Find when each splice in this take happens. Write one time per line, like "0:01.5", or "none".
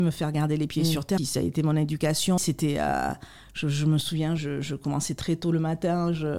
0:01.2
0:02.4
0:04.4